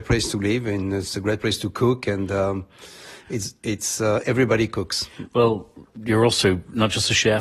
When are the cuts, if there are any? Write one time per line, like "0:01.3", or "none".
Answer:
none